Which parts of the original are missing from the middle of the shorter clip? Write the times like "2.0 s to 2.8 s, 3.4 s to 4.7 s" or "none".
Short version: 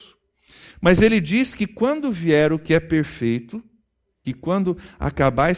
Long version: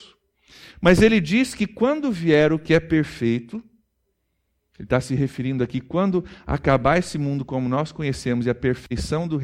4.2 s to 5.7 s